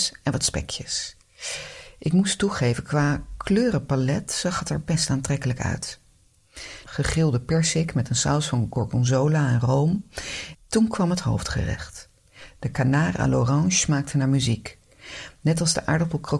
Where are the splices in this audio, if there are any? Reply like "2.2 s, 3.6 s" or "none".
6.9 s, 10.5 s